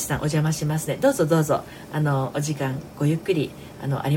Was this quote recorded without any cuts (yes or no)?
yes